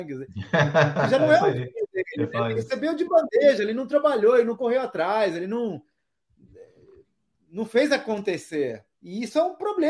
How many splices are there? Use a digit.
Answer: 1